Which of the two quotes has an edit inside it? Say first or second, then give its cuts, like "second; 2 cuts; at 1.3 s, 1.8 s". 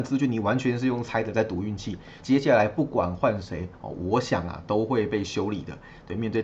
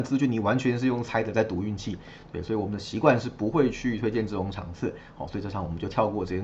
first; 1 cut; at 2.2 s